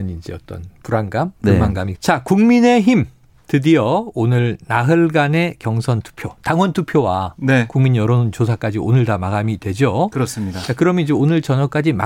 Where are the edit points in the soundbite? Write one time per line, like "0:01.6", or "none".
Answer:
0:01.9

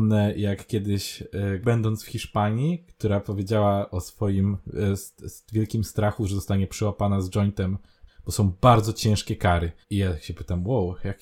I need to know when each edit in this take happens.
0:01.6
0:08.1
0:09.8

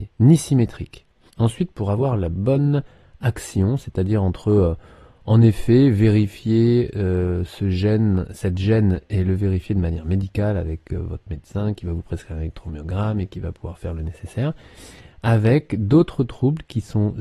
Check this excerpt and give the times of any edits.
0:01.3

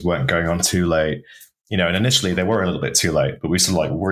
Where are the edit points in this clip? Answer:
none

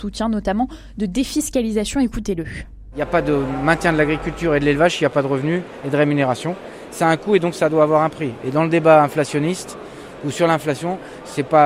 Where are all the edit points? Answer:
none

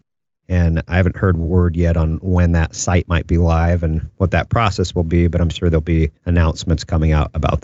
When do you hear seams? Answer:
0:06.2

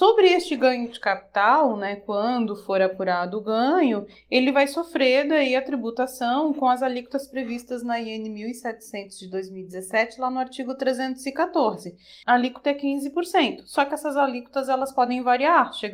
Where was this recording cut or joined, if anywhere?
0:12.2

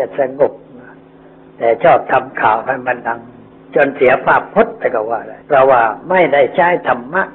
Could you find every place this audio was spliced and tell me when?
0:05.4

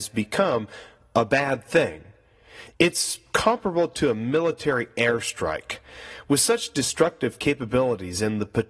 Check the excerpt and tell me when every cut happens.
0:02.7

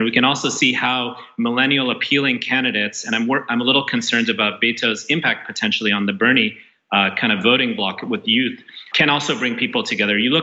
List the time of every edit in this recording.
0:08.9

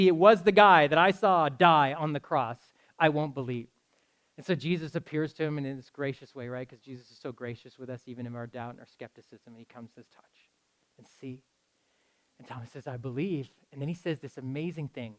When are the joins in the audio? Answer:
0:10.1

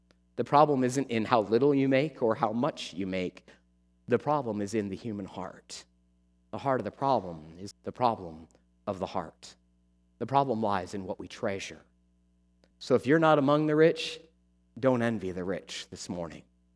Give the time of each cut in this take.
0:07.7
0:12.7

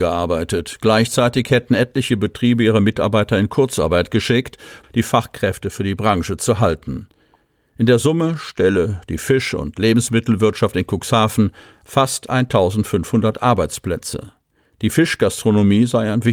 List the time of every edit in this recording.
0:04.8

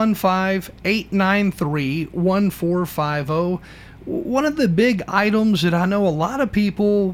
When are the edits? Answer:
none

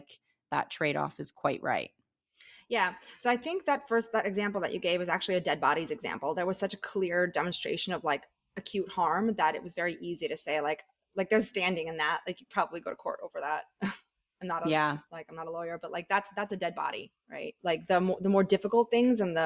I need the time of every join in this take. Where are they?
none

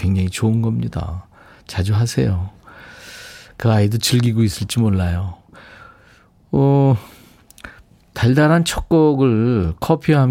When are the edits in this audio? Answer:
none

